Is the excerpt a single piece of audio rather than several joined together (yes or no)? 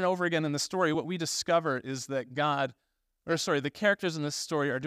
yes